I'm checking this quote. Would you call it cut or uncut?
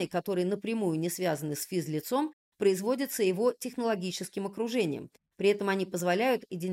uncut